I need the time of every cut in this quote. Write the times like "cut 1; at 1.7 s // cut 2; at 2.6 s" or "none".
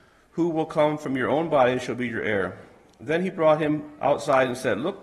none